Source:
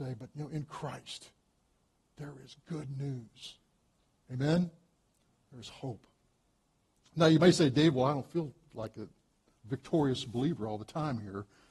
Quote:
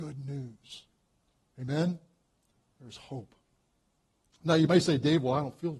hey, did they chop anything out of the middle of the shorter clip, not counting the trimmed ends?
no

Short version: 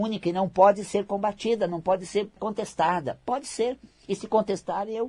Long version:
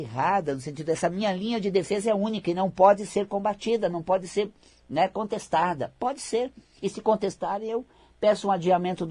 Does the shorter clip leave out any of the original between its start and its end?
yes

